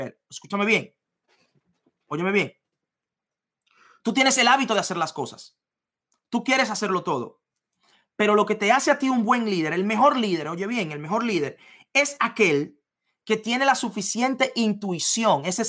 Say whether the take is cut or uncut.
uncut